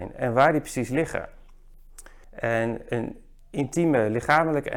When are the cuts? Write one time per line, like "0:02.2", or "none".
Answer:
0:02.2